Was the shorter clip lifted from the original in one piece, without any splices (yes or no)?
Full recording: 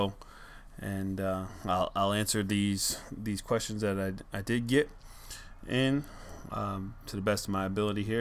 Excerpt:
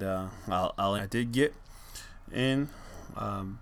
no